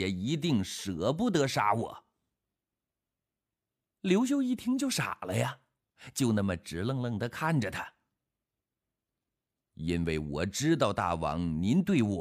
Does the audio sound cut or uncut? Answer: uncut